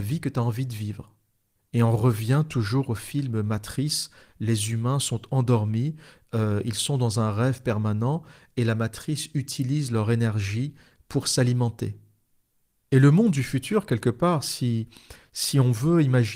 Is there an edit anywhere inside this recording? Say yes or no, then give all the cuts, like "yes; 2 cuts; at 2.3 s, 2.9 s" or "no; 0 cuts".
no; 0 cuts